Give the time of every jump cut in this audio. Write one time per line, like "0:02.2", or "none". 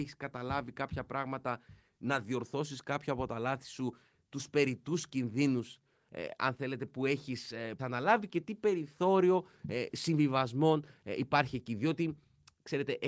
0:07.8